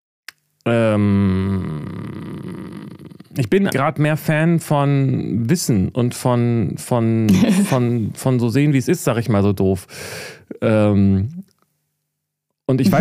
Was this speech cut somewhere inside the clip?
yes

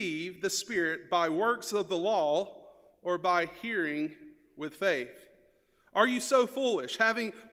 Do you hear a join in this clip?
no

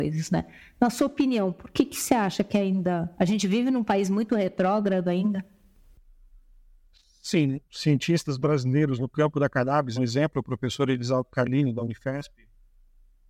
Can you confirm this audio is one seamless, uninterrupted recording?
no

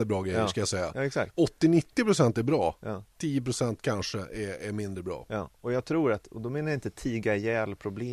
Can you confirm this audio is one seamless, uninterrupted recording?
yes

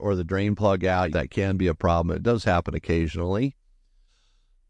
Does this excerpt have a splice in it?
yes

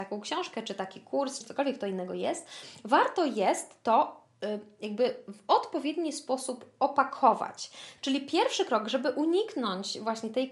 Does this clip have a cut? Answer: yes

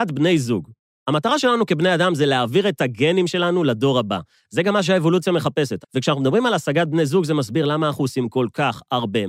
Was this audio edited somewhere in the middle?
yes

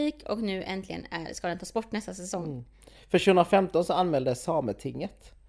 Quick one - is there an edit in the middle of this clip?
no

